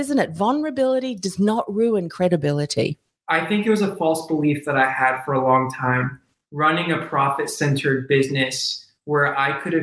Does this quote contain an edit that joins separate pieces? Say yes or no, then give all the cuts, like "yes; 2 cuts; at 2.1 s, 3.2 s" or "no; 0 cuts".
no; 0 cuts